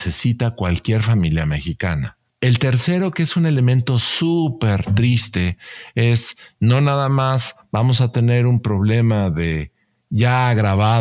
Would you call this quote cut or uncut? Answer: cut